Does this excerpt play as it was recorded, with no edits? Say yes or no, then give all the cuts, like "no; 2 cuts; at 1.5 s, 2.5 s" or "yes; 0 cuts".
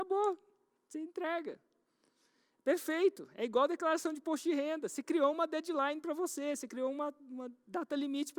yes; 0 cuts